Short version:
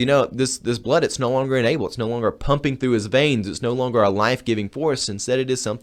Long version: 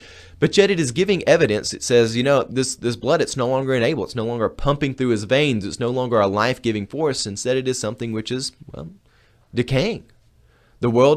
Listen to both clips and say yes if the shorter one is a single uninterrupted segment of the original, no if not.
yes